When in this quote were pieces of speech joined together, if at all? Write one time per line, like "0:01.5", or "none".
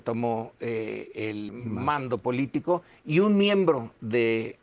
0:01.5